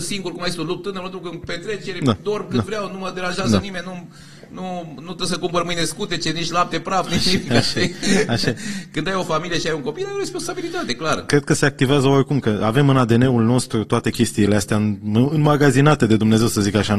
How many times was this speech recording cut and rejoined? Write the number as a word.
zero